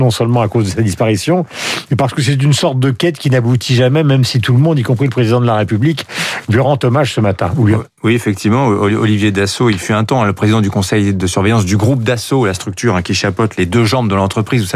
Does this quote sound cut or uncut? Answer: uncut